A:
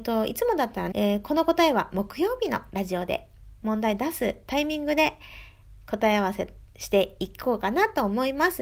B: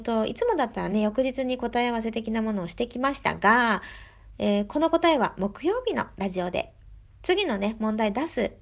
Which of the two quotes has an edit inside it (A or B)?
A